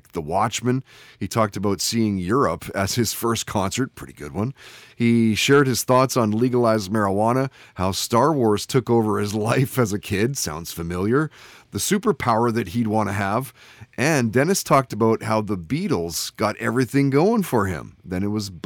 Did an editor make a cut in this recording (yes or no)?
no